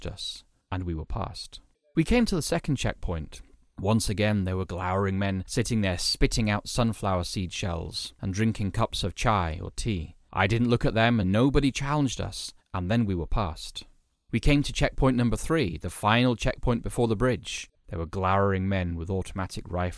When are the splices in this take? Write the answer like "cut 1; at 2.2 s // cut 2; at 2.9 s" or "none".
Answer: cut 1; at 11.2 s // cut 2; at 17.7 s